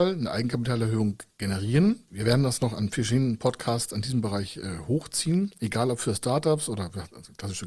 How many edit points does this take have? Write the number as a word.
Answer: one